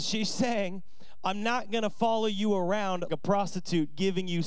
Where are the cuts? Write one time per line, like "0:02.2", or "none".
0:03.1